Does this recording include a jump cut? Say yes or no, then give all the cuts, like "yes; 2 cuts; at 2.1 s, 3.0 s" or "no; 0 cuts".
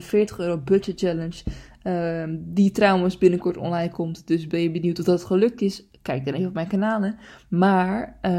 no; 0 cuts